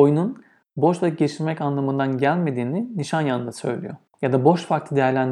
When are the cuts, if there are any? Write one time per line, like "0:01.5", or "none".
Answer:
0:04.1